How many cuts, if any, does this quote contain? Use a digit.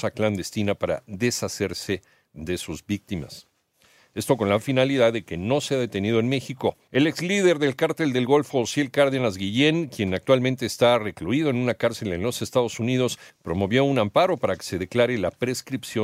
3